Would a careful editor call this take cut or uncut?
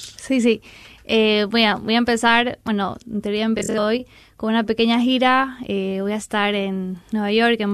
uncut